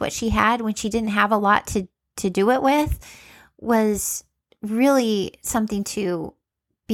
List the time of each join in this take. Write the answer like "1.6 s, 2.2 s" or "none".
none